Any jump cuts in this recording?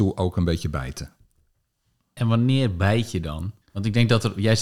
yes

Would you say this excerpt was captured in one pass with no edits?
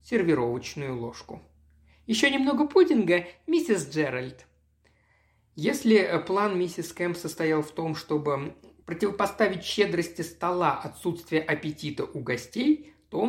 yes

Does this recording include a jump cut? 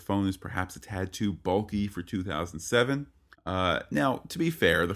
yes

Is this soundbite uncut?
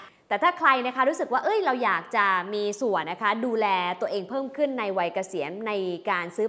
no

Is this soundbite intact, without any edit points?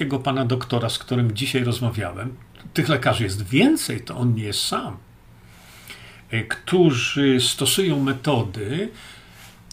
yes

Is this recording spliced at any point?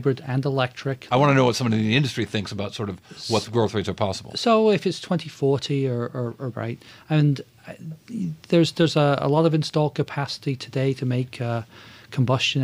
yes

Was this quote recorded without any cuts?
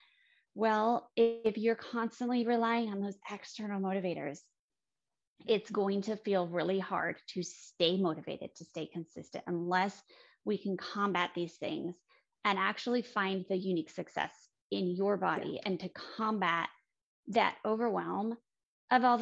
yes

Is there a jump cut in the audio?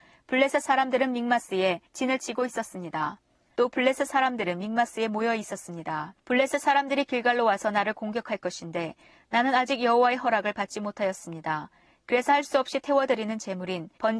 yes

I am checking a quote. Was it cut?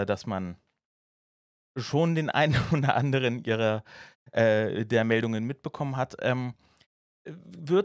no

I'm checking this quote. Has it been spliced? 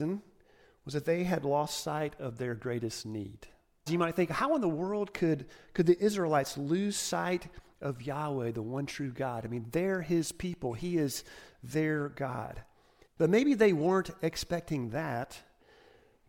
yes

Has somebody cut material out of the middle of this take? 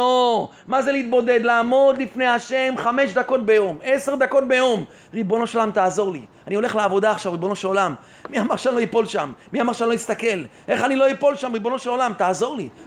no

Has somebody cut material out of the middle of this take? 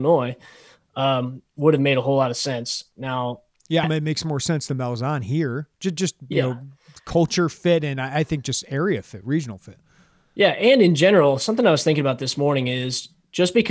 yes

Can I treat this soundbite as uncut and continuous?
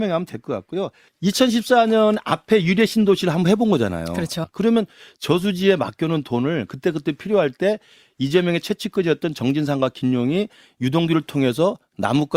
no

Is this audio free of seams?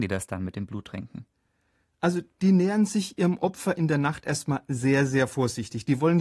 yes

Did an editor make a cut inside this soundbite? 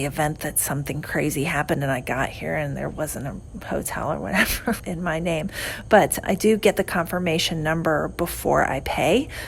yes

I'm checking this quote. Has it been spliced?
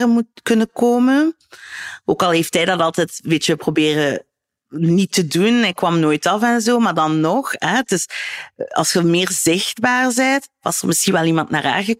no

